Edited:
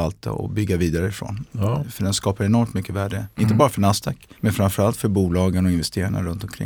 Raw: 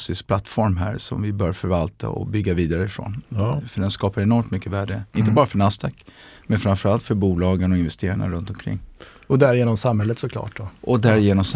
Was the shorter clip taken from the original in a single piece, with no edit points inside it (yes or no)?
no